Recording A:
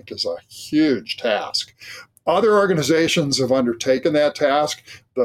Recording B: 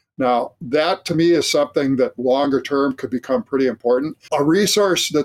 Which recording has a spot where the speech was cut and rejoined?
B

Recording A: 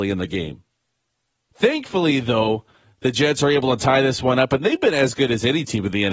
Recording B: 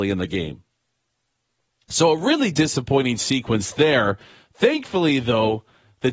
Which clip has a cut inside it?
A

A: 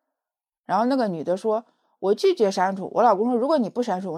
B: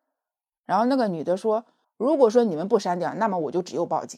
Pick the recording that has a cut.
B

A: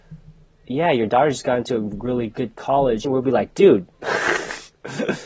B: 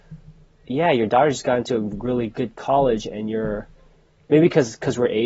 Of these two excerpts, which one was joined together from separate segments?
A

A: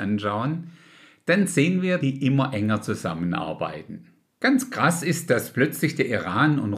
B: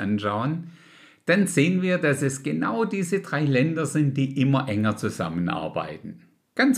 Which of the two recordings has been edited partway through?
A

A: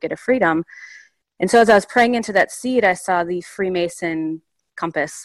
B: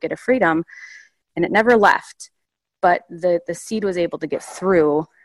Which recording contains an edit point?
B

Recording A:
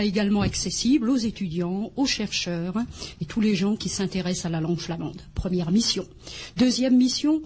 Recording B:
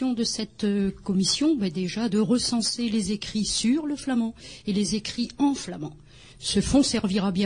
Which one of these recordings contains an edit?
B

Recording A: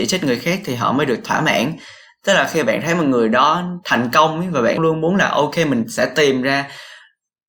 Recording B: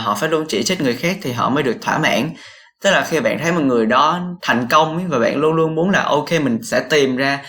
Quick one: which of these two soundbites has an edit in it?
A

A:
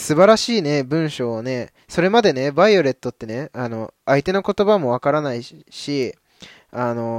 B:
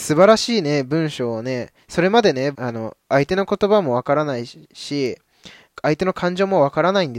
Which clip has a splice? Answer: B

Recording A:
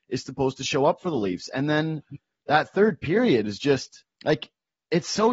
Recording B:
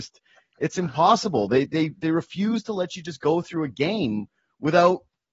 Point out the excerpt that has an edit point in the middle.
A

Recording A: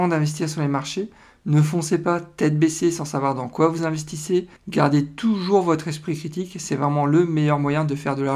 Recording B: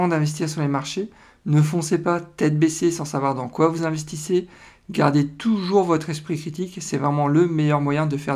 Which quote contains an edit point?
A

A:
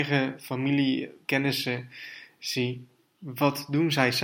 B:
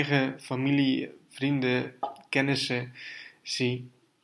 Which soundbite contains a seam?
A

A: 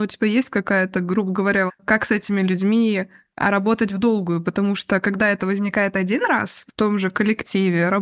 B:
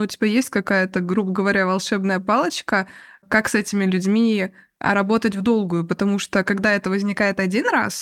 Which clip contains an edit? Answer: A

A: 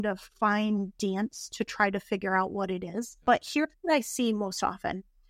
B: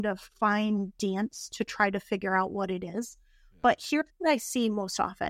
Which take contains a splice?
A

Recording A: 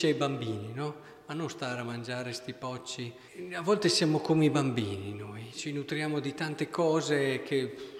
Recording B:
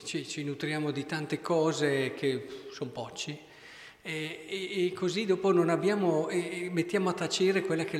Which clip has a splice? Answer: A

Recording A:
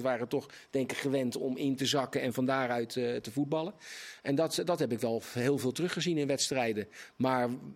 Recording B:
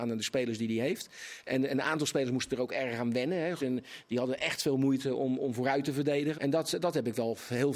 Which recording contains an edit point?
B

